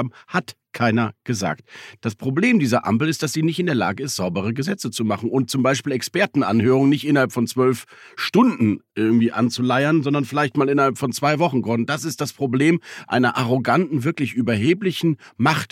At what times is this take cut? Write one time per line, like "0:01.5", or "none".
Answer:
none